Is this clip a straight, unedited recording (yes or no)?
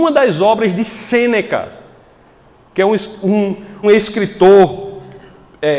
no